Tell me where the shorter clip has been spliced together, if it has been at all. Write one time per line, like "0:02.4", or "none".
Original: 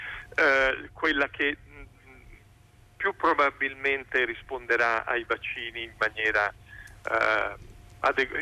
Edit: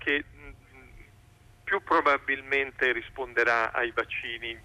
none